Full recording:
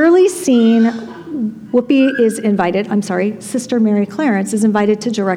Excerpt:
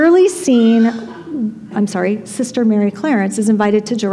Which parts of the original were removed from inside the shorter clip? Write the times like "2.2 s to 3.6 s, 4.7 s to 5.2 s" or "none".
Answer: 1.7 s to 2.9 s